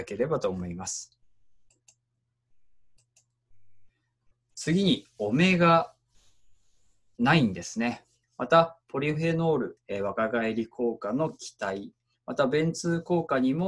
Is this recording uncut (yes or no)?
no